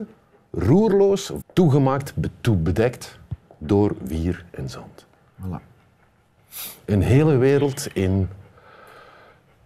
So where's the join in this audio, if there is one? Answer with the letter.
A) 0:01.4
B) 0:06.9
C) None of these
A